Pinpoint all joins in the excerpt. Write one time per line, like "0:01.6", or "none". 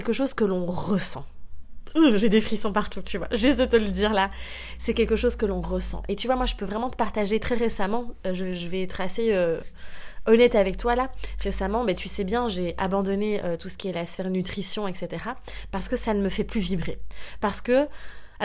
none